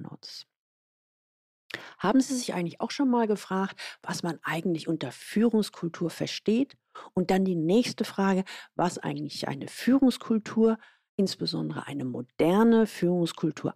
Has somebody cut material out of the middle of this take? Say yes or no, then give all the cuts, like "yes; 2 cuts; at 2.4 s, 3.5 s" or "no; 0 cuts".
no; 0 cuts